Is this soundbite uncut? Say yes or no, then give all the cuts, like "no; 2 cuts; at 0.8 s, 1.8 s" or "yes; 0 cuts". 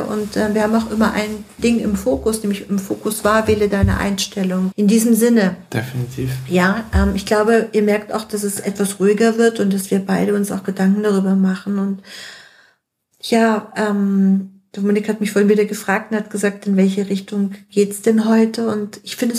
no; 1 cut; at 4.7 s